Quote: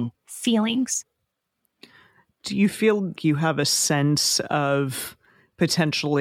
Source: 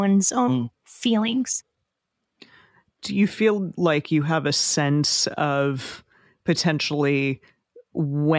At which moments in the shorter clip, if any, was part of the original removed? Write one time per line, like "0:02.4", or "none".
0:03.2